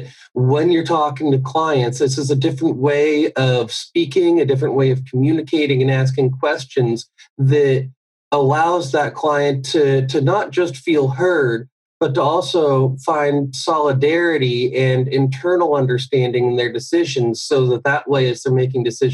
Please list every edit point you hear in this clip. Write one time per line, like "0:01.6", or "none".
none

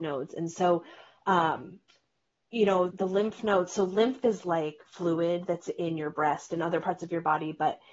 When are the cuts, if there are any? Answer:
0:02.9

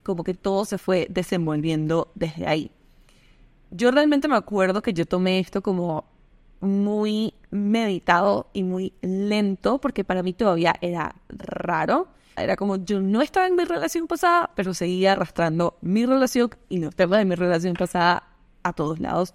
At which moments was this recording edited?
0:12.4

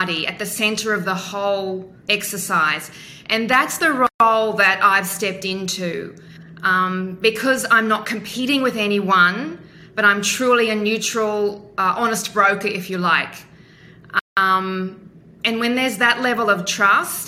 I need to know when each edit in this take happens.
0:02.0

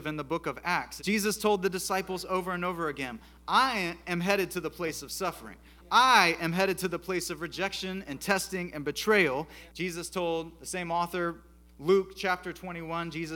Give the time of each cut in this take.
0:01.0
0:09.7

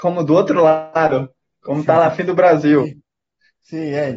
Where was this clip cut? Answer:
none

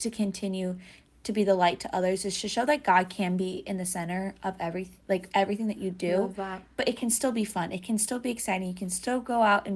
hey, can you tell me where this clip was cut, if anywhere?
none

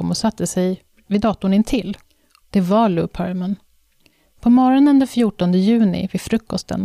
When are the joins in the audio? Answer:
0:02.4

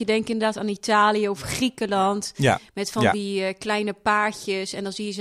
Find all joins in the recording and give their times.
none

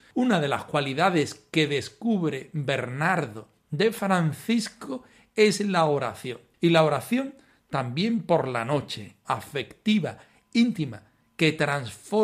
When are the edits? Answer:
0:09.2

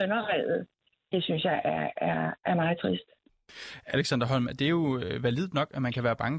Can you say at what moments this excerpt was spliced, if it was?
none

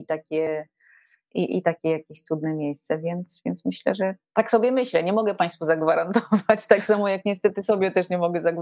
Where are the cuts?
none

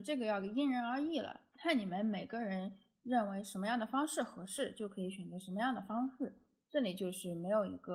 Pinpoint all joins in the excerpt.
none

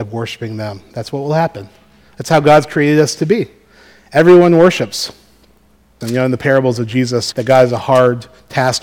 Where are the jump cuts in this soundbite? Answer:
0:06.0
0:07.3

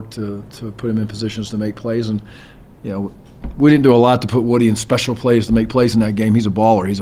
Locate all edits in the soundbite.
none

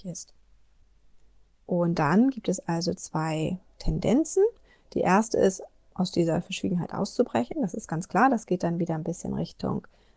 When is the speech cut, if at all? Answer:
0:01.7

